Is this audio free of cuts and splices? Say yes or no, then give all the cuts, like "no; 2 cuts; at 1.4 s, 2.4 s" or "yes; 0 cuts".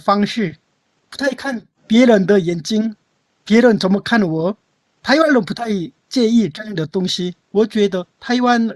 no; 1 cut; at 7.5 s